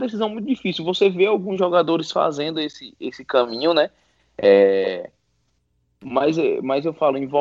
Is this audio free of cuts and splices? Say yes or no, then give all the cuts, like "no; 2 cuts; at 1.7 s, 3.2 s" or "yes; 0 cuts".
yes; 0 cuts